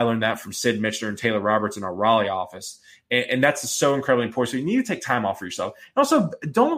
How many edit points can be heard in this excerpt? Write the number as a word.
zero